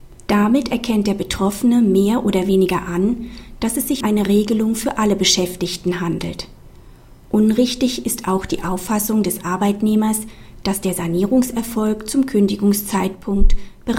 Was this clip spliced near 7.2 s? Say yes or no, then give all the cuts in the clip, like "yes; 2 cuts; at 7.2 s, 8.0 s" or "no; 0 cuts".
no; 1 cut; at 4.0 s